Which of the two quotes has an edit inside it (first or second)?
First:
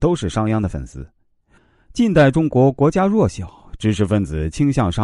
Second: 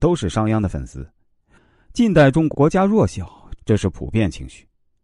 second